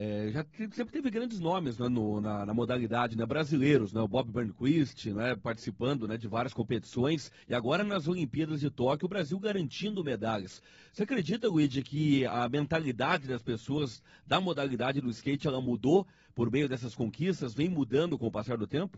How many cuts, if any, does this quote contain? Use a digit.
0